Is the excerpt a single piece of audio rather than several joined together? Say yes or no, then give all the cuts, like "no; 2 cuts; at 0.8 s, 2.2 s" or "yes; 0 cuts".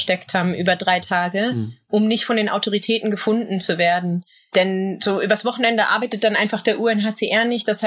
yes; 0 cuts